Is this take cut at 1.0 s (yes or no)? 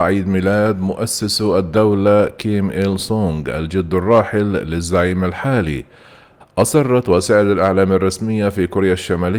no